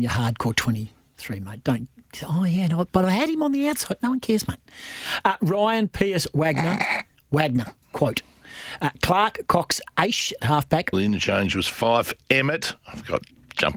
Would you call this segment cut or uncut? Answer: cut